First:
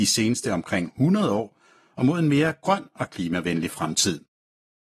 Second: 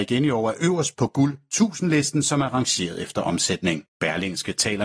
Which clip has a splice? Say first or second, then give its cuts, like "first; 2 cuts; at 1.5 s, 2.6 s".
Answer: second; 1 cut; at 3.9 s